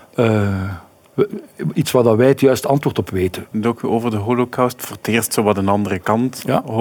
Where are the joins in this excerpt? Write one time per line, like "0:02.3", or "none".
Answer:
0:03.5